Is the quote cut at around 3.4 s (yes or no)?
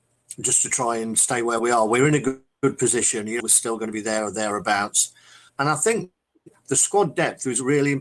yes